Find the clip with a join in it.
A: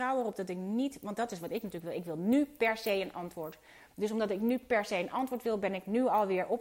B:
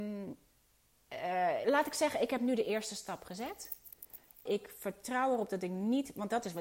B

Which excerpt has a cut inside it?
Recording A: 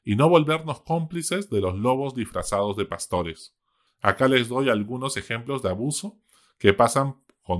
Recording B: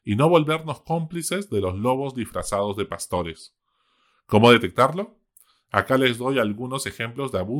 A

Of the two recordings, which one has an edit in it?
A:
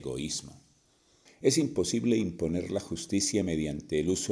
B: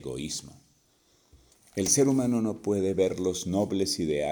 A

